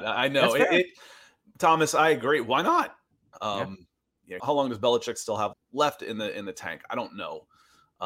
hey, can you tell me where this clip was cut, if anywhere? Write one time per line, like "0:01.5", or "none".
0:03.3
0:04.4
0:05.5